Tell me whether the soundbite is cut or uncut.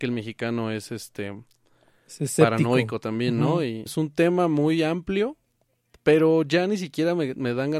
cut